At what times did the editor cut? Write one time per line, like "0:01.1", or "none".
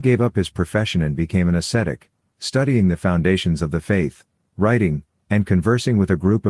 0:05.2